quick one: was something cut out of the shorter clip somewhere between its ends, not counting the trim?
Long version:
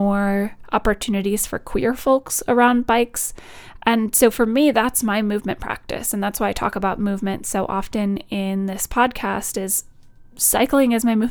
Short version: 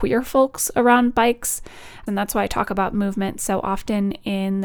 yes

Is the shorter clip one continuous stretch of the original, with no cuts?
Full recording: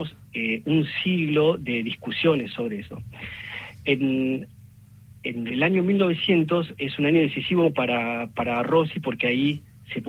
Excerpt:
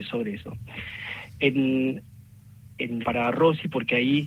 no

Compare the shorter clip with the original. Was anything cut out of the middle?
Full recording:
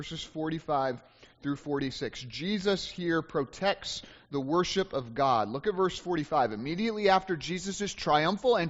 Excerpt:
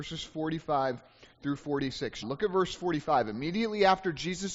yes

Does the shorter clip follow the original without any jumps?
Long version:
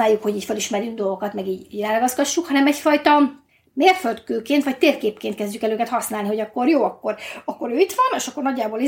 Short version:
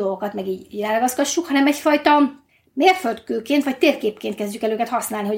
yes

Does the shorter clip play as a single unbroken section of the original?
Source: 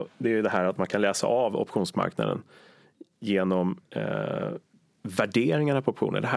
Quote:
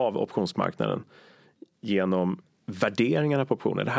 no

